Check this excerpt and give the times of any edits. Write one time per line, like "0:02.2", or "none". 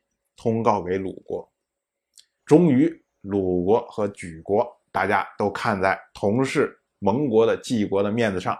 0:02.4
0:04.9

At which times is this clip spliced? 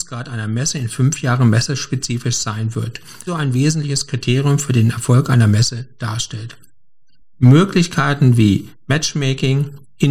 0:03.3
0:07.2

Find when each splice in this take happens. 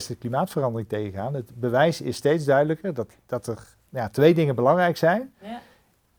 none

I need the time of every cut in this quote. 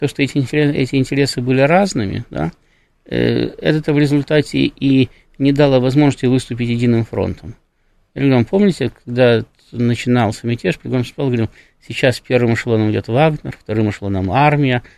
none

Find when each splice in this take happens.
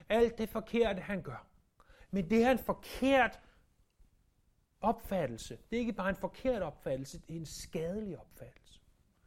none

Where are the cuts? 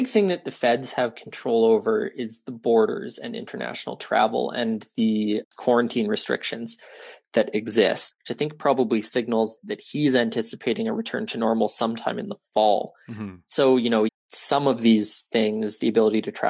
0:08.1
0:14.1

